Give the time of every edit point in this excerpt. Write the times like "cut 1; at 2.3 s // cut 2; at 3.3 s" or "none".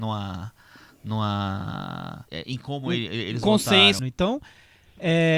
cut 1; at 2.3 s // cut 2; at 4.0 s